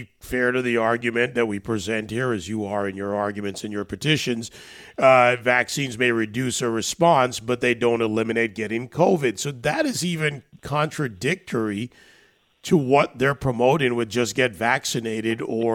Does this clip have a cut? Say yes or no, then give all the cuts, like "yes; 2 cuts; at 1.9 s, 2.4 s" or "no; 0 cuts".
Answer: no; 0 cuts